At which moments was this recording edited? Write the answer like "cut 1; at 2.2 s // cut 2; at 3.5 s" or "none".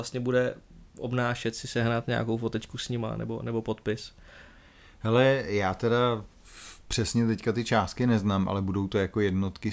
none